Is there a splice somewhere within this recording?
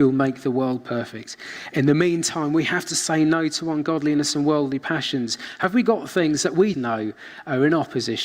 yes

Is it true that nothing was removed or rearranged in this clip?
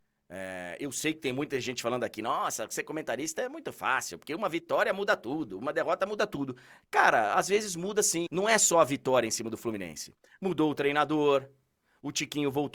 no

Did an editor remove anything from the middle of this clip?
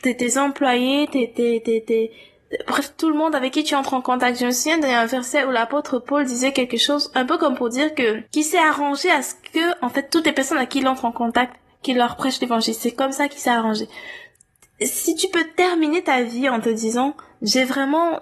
yes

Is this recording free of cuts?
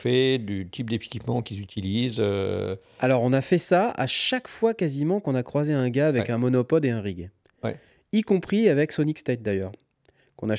yes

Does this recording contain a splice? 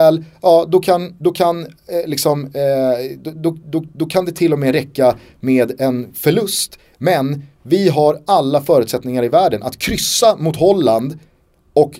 yes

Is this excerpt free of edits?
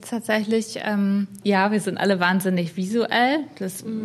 no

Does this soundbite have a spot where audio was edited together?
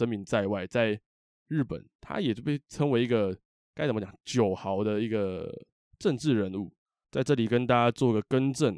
yes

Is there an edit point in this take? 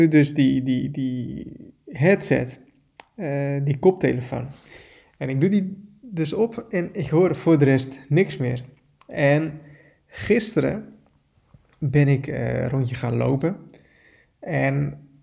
no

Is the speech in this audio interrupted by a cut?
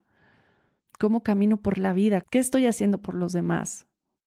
yes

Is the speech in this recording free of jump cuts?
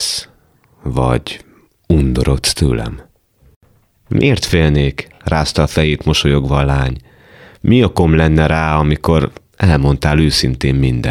yes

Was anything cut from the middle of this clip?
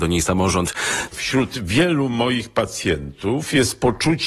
yes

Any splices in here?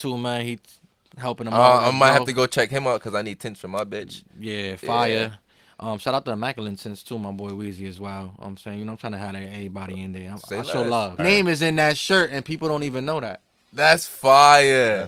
yes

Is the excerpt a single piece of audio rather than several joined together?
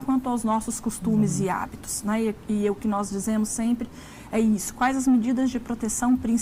yes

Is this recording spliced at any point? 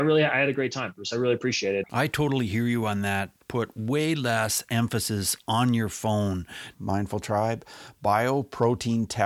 yes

